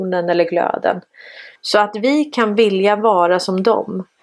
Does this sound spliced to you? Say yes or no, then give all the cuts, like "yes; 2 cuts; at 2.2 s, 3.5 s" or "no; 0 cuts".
yes; 1 cut; at 1.6 s